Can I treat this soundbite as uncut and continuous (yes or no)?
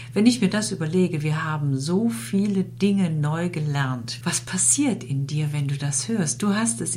no